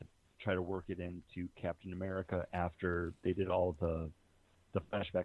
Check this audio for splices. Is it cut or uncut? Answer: uncut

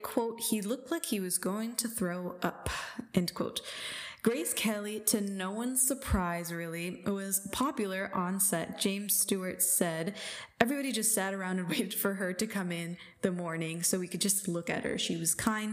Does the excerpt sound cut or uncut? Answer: uncut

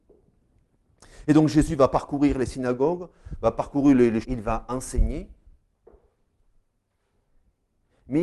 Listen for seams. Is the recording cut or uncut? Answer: cut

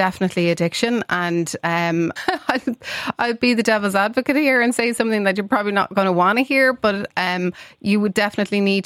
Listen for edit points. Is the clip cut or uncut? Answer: cut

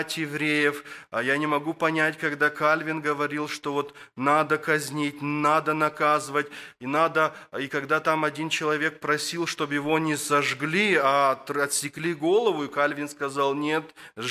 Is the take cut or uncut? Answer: uncut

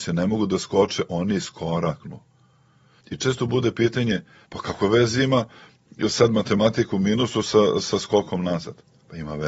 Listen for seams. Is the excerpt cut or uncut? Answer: cut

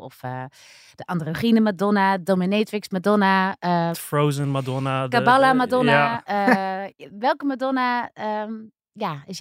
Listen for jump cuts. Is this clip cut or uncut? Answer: cut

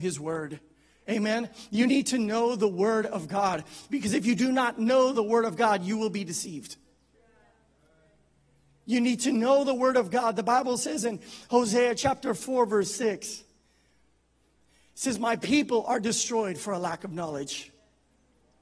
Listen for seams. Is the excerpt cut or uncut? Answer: uncut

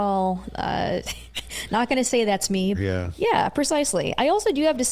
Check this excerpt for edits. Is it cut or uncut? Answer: cut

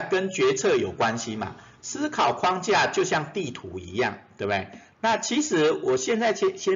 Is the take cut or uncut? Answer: uncut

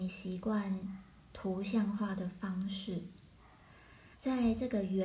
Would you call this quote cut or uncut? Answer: cut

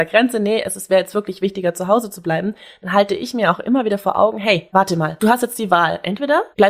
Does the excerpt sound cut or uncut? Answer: uncut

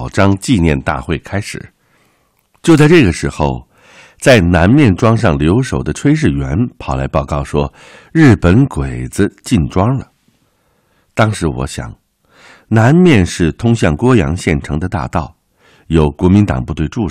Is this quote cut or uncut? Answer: uncut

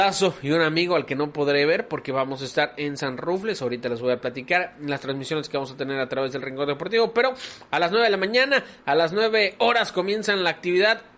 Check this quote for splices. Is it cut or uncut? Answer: uncut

